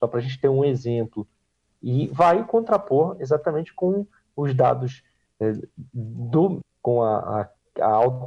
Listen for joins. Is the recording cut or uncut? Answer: cut